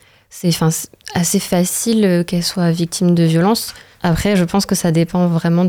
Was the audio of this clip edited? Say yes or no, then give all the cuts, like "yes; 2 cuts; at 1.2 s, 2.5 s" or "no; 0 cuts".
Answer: yes; 1 cut; at 3.9 s